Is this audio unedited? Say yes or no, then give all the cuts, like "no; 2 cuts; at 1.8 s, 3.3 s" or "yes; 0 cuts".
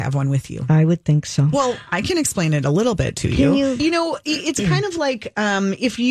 no; 2 cuts; at 1.5 s, 3.8 s